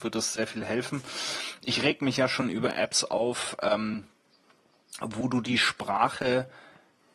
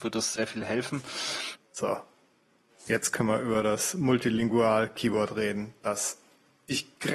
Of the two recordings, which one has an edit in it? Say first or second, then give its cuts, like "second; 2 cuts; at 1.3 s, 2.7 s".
second; 1 cut; at 1.6 s